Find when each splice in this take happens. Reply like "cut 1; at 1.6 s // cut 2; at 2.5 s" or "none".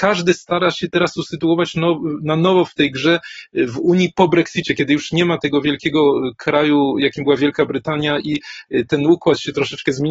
none